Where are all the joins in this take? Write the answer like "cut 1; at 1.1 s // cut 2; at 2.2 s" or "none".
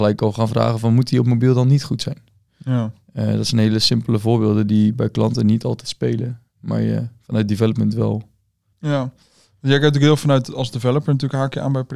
cut 1; at 8.7 s